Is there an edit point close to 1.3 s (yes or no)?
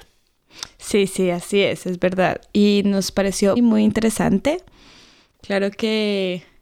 no